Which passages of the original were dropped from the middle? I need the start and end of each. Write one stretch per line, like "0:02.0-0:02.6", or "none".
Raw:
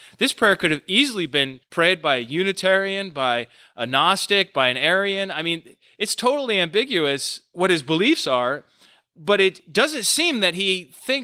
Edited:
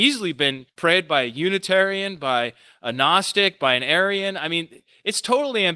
none

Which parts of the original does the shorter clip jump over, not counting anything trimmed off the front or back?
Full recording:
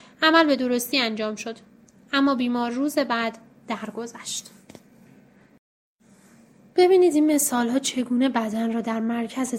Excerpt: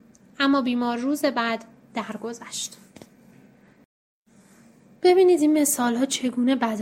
none

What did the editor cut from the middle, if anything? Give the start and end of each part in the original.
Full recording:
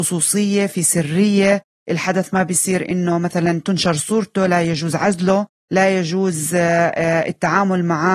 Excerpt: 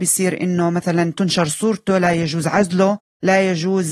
none

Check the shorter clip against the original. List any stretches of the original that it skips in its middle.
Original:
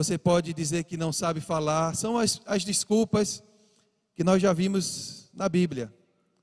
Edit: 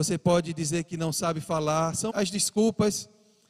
0:02.1-0:02.4

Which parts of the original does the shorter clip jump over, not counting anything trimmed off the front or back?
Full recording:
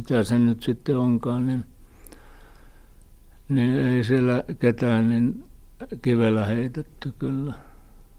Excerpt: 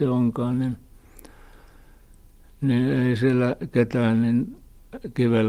none

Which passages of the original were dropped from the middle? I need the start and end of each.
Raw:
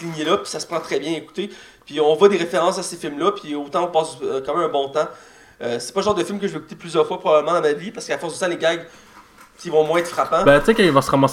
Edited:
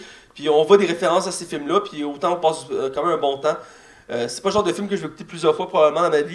none

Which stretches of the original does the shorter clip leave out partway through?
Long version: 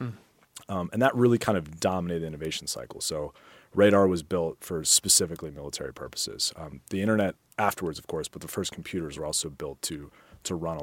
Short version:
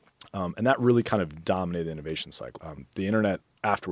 0:02.9-0:06.5

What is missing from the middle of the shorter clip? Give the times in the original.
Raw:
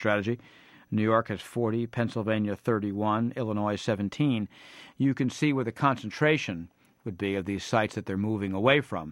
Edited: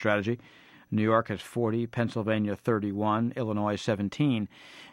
none

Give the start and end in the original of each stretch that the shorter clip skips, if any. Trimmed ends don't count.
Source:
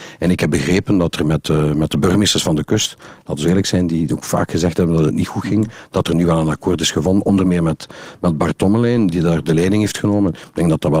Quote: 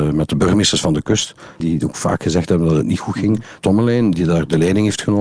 0:03.2-0:03.9
0:05.9-0:08.6

